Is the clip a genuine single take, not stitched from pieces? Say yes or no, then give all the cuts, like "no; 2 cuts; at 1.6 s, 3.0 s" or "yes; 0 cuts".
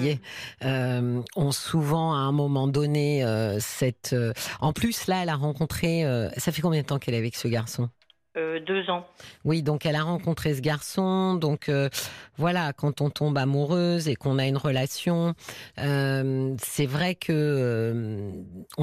yes; 0 cuts